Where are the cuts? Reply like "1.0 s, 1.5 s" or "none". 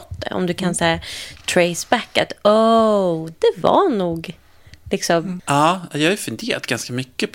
3.3 s, 5.4 s